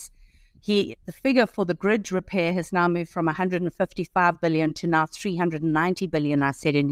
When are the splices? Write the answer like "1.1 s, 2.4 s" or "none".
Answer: 1.0 s